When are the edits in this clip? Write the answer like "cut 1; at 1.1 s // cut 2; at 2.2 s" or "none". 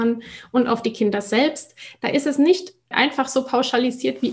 cut 1; at 2.9 s

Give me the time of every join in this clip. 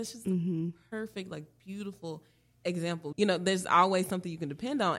cut 1; at 3.1 s

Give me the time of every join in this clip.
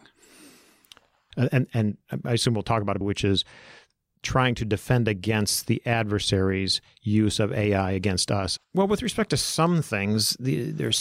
cut 1; at 1.3 s // cut 2; at 3.0 s // cut 3; at 8.6 s

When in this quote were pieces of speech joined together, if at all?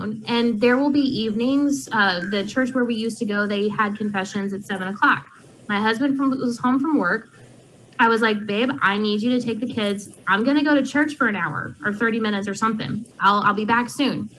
cut 1; at 13.1 s

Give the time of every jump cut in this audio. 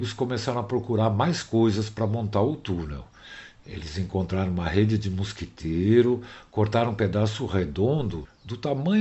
none

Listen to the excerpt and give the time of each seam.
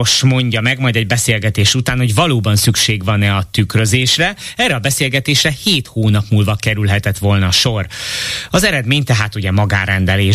none

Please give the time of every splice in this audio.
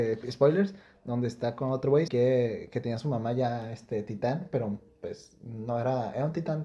cut 1; at 2.1 s

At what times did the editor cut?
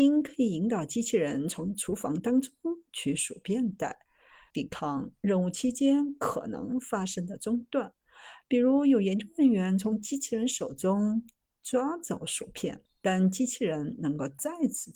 cut 1; at 4.5 s // cut 2; at 12.9 s

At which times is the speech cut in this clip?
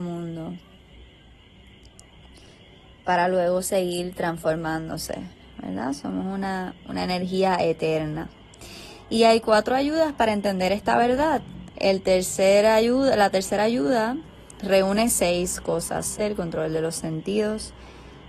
cut 1; at 6.7 s // cut 2; at 11.7 s // cut 3; at 16.2 s

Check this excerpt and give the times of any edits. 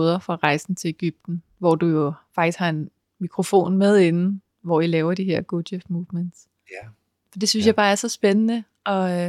none

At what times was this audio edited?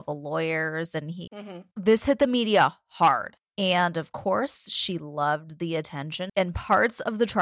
cut 1; at 1.3 s // cut 2; at 6.3 s

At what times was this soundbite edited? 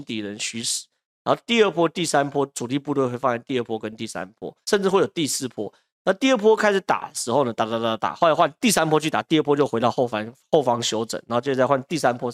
cut 1; at 4.6 s

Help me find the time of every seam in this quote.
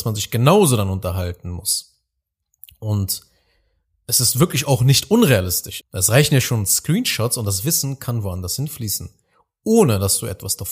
cut 1; at 5.8 s

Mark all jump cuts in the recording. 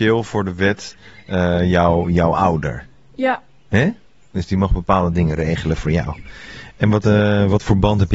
cut 1; at 7.0 s

